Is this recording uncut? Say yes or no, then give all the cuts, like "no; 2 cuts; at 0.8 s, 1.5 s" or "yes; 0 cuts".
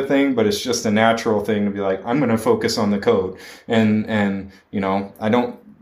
yes; 0 cuts